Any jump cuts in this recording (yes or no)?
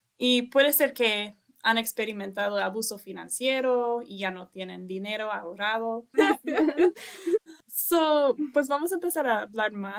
yes